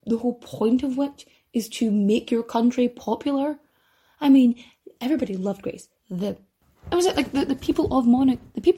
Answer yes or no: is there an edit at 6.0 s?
yes